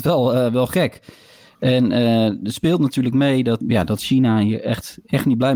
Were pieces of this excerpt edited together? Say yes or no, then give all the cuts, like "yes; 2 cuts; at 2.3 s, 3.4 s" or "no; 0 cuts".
yes; 1 cut; at 3.6 s